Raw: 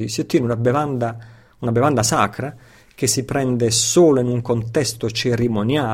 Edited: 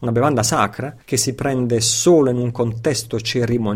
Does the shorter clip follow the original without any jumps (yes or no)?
no